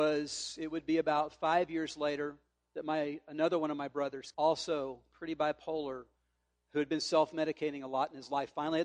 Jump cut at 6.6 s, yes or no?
no